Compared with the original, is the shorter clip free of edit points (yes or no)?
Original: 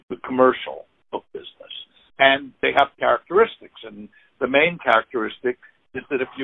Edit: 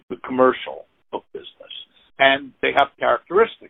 yes